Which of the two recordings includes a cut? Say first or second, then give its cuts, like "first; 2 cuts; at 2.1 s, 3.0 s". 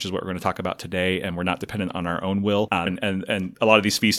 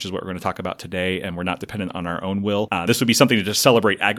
first; 1 cut; at 2.9 s